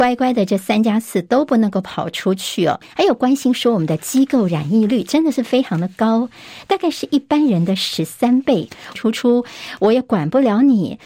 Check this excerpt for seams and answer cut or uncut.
cut